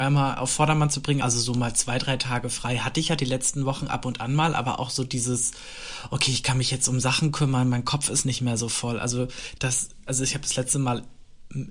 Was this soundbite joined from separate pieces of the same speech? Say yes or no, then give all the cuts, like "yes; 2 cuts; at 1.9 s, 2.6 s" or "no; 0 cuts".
yes; 2 cuts; at 1.2 s, 9.6 s